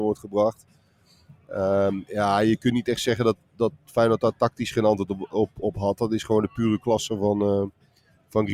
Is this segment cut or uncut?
uncut